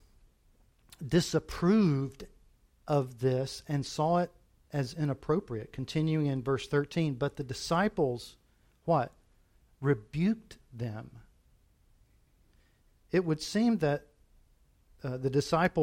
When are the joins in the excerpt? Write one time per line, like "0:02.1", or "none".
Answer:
none